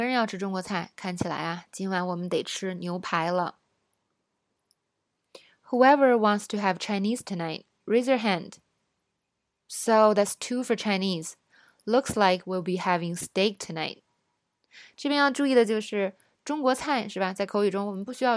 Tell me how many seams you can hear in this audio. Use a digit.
0